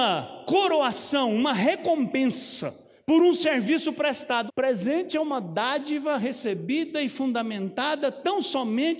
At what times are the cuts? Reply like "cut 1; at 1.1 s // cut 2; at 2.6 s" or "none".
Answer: cut 1; at 4.5 s